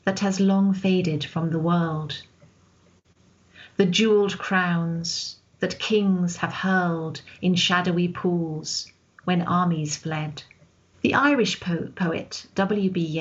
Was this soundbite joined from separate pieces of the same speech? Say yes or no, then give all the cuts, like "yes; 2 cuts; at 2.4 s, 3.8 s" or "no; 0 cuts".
yes; 1 cut; at 10.9 s